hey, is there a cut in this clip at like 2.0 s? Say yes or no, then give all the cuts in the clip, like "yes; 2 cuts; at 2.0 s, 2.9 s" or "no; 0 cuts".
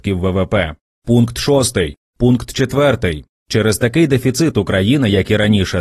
yes; 1 cut; at 2.0 s